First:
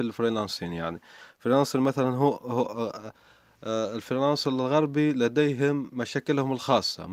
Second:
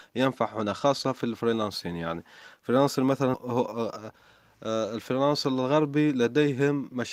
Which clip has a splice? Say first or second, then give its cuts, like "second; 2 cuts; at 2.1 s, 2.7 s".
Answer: second; 1 cut; at 3.3 s